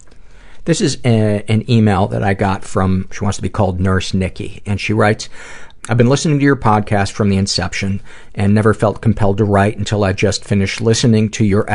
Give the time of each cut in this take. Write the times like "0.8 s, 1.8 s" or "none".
3.1 s, 5.8 s